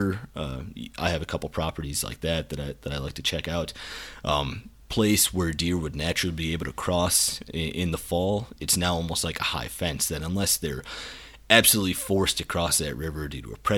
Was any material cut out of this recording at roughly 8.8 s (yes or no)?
no